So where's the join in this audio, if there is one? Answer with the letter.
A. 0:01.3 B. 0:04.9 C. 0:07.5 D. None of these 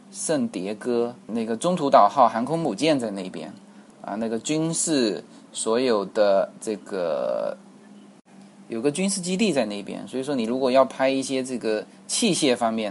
A